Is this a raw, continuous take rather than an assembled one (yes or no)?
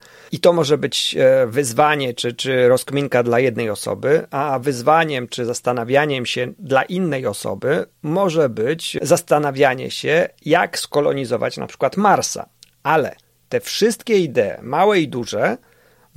yes